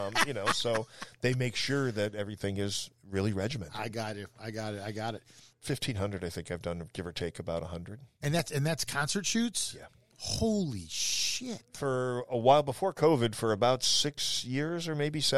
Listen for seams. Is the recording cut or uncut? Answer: cut